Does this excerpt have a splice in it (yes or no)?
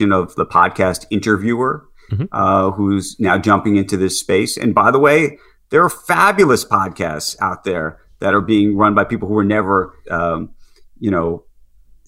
yes